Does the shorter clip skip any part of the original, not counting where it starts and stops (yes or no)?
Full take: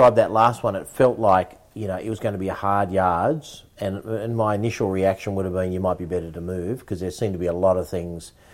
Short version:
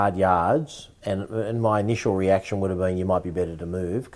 no